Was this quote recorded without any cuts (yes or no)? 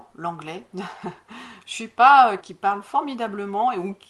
no